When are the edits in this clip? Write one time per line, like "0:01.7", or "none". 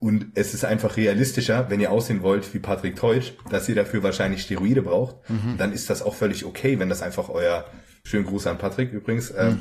0:08.1